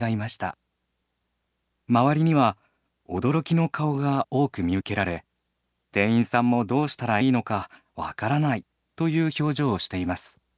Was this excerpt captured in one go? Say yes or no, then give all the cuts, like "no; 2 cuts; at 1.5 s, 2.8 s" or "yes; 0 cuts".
no; 1 cut; at 7.2 s